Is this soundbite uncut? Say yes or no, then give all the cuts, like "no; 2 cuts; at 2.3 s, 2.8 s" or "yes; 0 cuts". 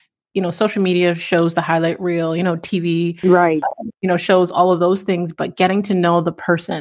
yes; 0 cuts